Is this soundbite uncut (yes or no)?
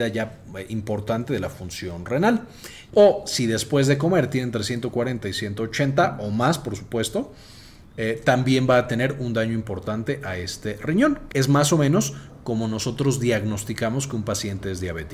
no